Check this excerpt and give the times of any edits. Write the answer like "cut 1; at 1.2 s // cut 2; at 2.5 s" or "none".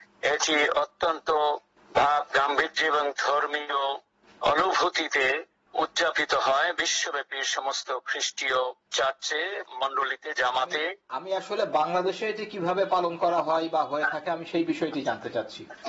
none